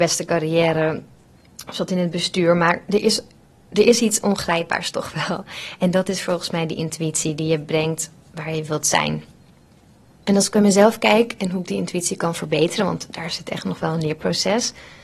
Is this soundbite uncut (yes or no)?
yes